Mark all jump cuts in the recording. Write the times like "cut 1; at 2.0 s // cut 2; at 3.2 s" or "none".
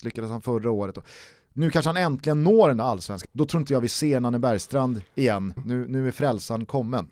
cut 1; at 3.2 s // cut 2; at 5.6 s